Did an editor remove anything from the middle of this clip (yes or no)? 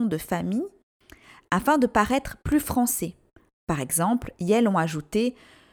no